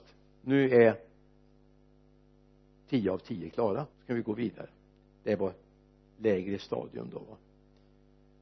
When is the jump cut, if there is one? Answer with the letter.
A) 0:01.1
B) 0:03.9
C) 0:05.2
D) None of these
B